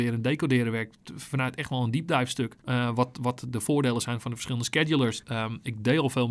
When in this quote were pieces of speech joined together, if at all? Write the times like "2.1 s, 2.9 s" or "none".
2.6 s, 5.2 s